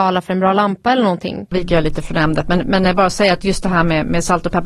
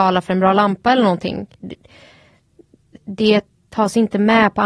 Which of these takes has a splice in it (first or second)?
first